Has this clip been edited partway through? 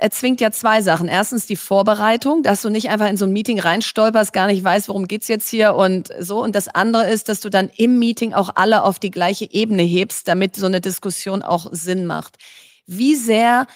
no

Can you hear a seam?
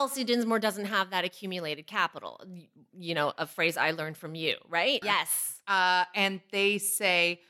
yes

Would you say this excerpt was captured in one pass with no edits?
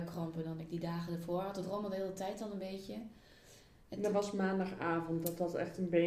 yes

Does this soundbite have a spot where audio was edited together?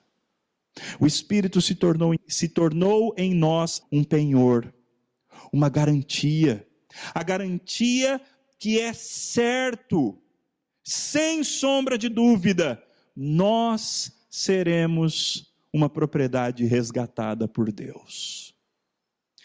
yes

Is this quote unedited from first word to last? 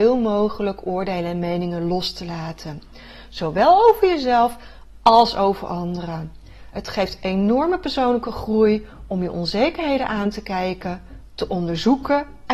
yes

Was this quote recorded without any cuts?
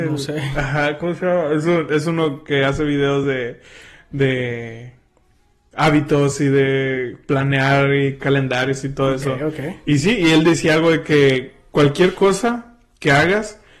yes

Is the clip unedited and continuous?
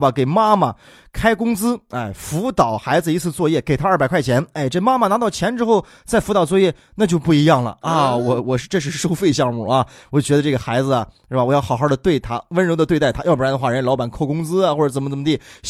yes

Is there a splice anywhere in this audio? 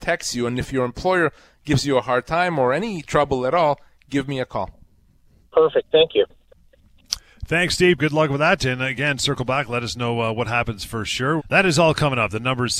yes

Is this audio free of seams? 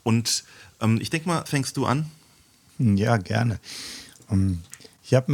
no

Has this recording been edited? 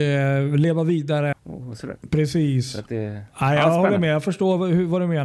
yes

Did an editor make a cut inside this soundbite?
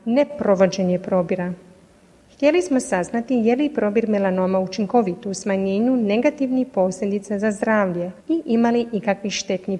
yes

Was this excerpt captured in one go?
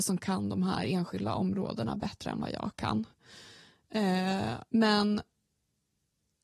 no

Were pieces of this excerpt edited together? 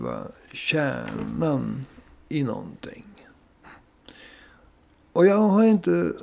no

